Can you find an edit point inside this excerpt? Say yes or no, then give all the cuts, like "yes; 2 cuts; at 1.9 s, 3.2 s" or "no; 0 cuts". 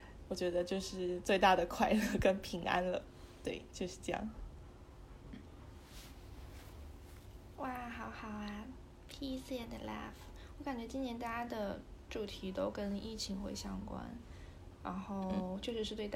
no; 0 cuts